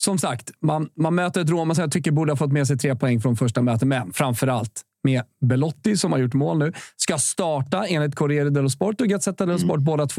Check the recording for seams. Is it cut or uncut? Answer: uncut